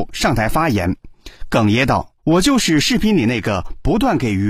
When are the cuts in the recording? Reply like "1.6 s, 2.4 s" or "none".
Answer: 2.2 s